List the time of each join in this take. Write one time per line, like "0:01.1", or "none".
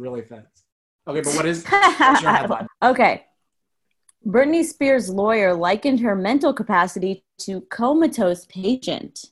0:02.7